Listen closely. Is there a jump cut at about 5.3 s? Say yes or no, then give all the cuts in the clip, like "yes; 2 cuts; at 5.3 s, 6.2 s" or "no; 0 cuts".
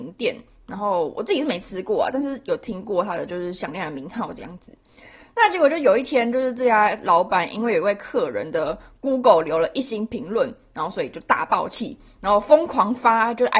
no; 0 cuts